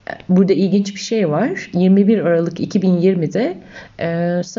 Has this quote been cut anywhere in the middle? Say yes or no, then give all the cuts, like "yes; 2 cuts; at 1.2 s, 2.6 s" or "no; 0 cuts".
no; 0 cuts